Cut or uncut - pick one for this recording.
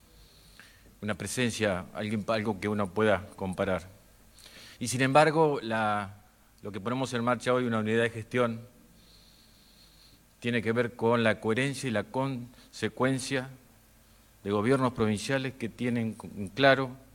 uncut